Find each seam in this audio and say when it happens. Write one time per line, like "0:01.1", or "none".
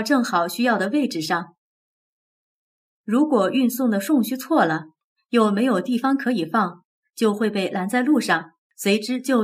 0:05.1